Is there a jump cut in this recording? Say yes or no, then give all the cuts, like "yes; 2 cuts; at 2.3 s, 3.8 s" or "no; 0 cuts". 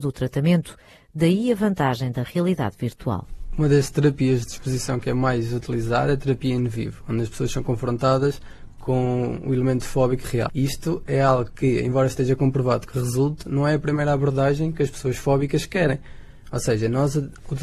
yes; 1 cut; at 10.5 s